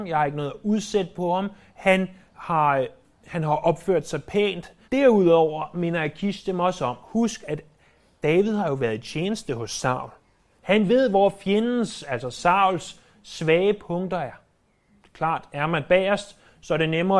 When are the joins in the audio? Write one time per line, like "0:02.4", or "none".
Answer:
0:04.8
0:10.5
0:15.0